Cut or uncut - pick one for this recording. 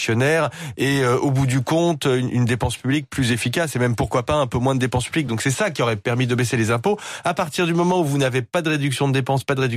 uncut